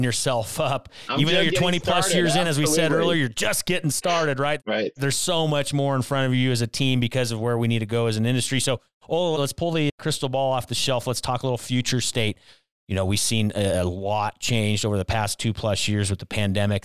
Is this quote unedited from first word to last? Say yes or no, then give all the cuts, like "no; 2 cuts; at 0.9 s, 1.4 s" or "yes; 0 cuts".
yes; 0 cuts